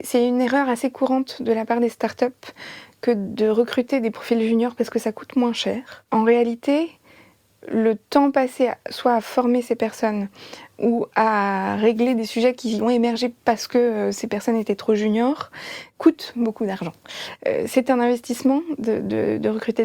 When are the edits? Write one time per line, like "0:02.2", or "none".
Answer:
none